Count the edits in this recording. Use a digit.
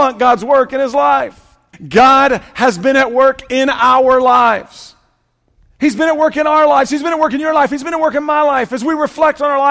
1